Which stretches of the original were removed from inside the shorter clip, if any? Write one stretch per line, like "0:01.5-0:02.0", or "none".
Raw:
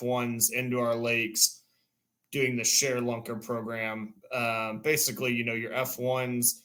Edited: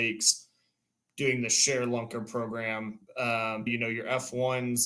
0:04.8-0:05.3